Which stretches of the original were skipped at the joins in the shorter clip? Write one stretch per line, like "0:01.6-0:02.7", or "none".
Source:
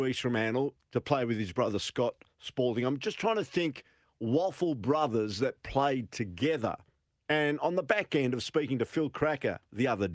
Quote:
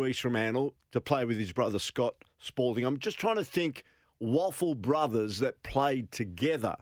none